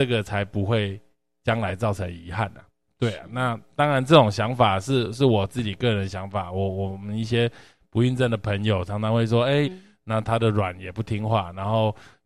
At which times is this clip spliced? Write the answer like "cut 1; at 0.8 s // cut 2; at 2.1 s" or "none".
cut 1; at 9.6 s